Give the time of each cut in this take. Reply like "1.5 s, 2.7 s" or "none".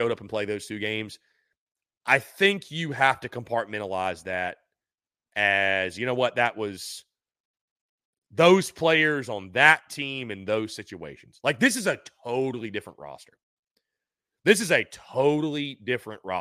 none